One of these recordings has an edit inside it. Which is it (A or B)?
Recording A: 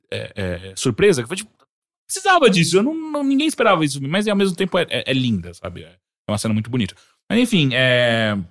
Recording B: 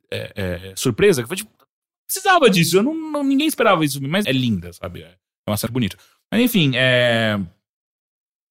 B